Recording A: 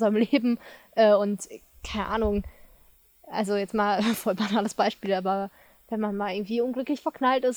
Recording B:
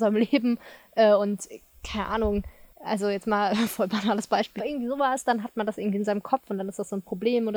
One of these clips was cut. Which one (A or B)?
B